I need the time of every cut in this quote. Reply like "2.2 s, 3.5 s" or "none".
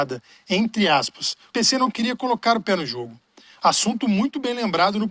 1.5 s